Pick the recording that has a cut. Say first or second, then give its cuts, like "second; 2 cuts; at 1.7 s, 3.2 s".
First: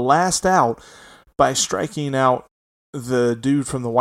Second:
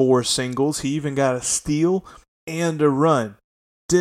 second; 1 cut; at 2.3 s